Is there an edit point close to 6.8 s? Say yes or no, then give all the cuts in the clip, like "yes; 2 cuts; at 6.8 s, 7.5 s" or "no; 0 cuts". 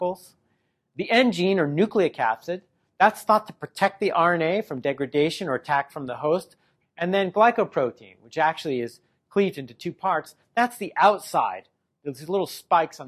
yes; 1 cut; at 6.8 s